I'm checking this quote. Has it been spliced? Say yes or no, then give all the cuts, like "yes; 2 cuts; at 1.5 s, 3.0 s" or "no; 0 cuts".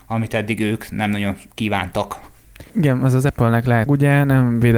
yes; 2 cuts; at 2.7 s, 3.9 s